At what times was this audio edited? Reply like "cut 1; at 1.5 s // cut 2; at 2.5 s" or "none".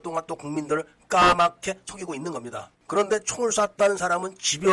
cut 1; at 2.8 s